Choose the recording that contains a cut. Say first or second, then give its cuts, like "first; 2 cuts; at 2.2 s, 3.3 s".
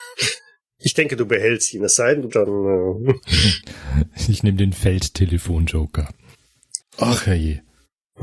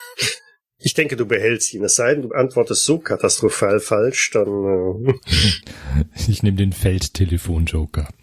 first; 2 cuts; at 2.3 s, 6.8 s